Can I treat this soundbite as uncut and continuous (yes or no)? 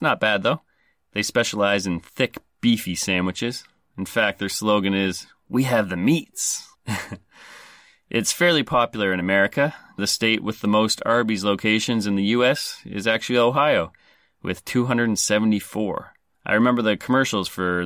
no